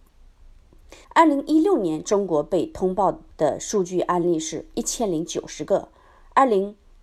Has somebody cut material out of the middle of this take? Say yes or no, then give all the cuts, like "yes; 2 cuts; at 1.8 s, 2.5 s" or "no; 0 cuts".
yes; 2 cuts; at 1.0 s, 3.3 s